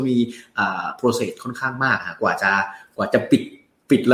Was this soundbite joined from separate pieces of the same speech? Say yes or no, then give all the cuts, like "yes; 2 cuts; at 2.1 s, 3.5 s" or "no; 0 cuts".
no; 0 cuts